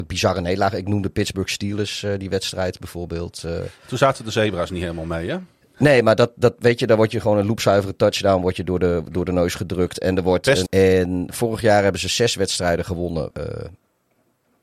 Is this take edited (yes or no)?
yes